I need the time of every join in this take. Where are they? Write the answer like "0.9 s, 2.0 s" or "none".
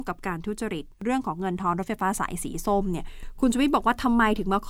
0.9 s